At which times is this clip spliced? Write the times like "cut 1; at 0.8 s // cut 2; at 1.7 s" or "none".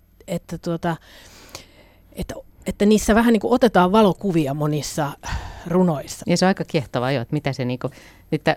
cut 1; at 6.2 s